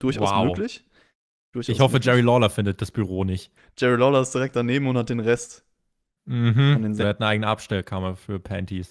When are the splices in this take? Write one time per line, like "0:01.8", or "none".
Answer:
0:03.6
0:07.0